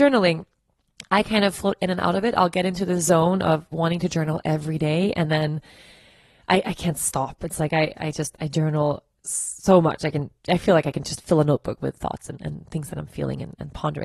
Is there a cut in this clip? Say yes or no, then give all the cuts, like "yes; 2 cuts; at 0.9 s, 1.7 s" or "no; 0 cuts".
no; 0 cuts